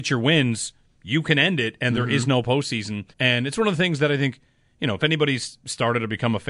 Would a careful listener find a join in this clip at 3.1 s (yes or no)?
yes